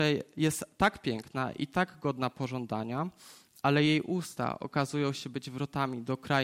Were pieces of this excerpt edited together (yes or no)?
no